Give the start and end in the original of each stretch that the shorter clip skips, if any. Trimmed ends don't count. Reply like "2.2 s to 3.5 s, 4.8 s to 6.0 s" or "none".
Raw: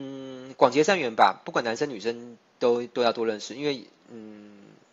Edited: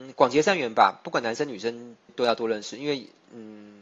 2.5 s to 2.9 s